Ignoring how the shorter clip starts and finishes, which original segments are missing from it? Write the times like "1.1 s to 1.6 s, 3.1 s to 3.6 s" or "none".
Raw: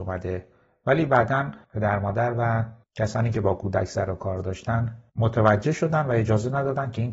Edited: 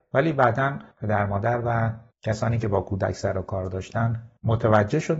none

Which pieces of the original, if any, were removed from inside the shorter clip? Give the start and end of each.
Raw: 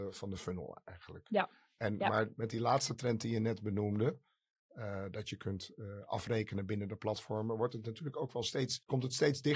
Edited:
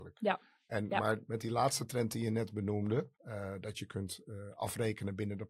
4.2 s to 4.7 s

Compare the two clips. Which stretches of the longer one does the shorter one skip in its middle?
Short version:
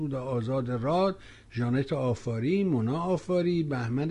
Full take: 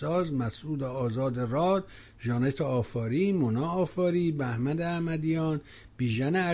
none

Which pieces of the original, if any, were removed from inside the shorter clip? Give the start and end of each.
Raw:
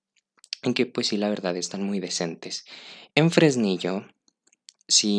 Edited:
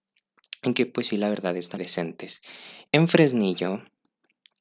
1.8 s to 2.0 s

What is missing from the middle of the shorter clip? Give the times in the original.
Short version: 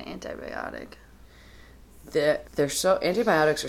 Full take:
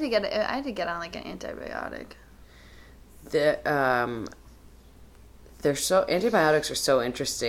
3.6 s to 5.5 s

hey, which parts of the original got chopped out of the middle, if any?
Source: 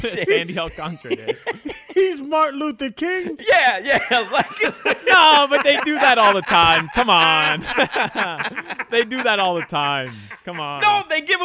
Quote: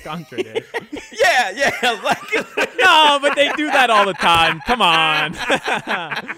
1.8 s to 3.4 s

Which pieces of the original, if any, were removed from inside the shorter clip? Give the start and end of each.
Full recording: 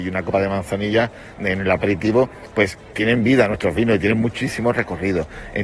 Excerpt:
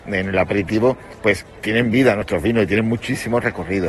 none

